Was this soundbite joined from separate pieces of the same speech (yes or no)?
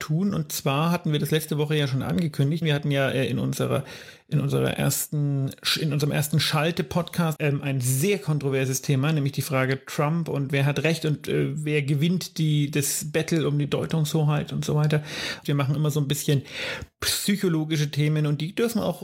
yes